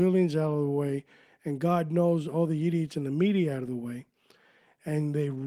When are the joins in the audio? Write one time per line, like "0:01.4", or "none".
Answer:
none